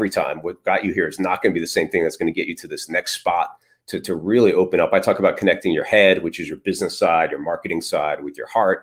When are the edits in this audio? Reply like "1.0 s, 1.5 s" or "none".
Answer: none